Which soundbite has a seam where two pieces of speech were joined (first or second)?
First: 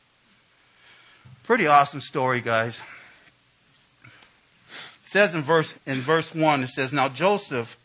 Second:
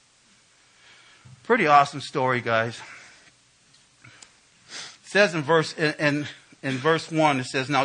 first